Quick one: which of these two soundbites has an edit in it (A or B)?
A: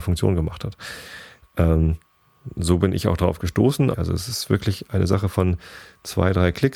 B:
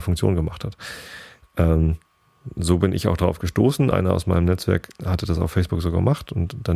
A